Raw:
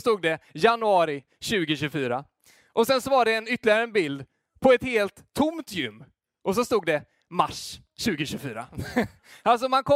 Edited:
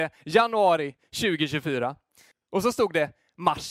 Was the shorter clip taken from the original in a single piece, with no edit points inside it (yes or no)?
no